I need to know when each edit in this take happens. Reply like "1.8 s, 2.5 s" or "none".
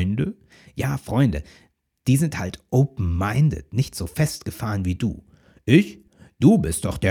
none